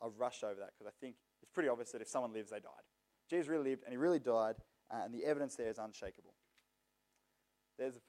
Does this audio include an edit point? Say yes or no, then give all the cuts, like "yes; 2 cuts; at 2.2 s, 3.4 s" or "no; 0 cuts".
yes; 1 cut; at 3.2 s